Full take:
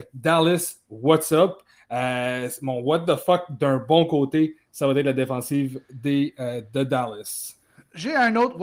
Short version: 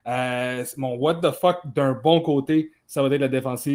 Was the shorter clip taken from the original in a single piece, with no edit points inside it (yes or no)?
yes